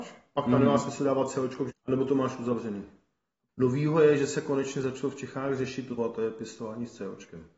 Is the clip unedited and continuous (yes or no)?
no